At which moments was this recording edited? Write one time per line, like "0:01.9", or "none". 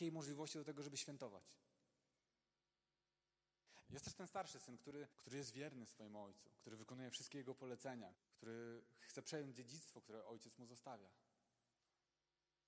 0:03.8
0:05.1
0:08.1